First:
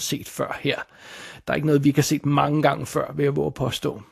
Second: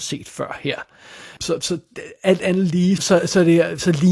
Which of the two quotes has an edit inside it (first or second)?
second